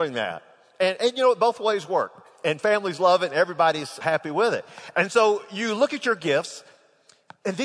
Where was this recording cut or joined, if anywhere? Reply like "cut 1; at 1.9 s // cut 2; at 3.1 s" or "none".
cut 1; at 4.0 s